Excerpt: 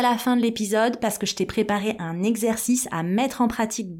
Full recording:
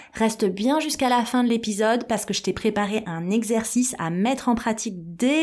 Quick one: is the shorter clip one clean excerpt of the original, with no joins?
yes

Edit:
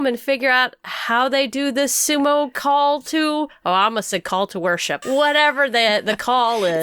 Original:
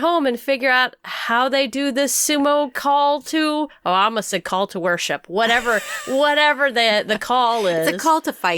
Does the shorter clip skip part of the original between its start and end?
yes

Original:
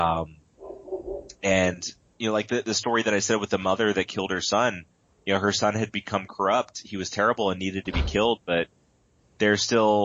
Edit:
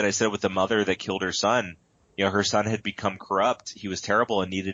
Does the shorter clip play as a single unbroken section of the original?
yes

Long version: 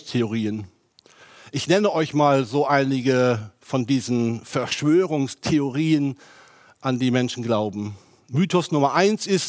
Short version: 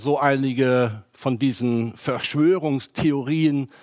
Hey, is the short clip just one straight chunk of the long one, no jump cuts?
yes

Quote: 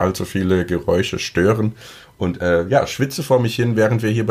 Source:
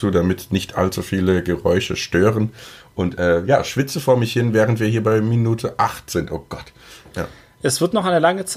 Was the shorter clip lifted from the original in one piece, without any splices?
yes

